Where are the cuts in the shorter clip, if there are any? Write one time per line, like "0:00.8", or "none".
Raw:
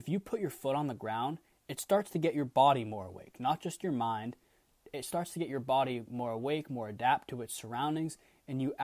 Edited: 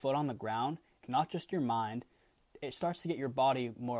0:01.0